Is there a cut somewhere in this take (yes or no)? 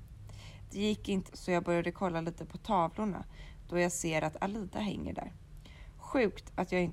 yes